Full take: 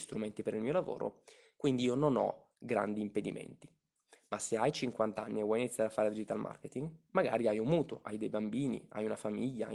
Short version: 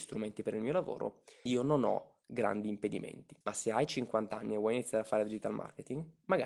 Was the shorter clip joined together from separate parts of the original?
yes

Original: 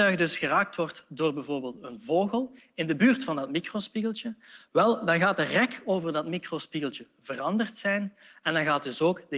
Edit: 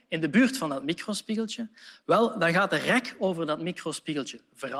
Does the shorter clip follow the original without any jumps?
yes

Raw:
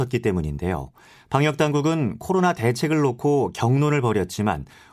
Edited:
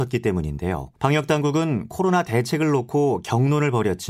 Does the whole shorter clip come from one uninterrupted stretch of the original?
no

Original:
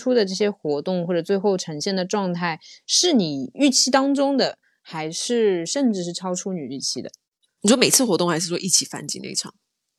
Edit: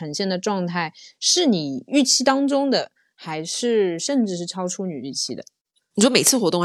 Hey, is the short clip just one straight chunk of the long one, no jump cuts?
yes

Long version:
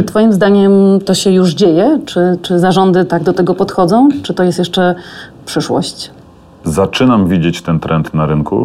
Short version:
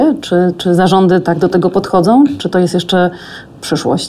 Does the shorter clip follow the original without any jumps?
yes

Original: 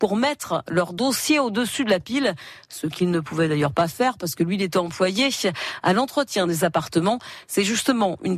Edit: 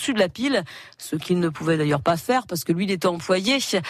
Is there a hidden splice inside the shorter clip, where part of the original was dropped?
no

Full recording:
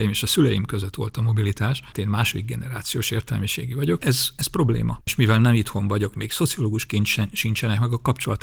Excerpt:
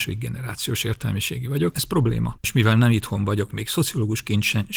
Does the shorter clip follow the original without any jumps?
no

